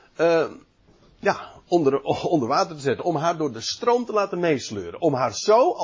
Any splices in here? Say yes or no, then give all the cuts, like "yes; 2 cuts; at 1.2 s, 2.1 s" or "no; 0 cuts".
no; 0 cuts